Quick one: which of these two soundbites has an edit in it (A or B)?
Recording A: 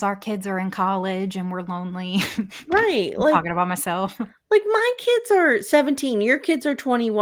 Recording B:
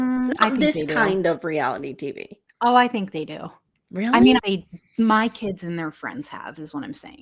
B